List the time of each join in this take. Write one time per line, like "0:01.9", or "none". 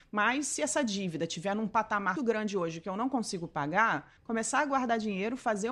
0:02.2
0:04.2